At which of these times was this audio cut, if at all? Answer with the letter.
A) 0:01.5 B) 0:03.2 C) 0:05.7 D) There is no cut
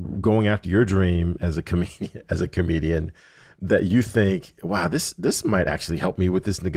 D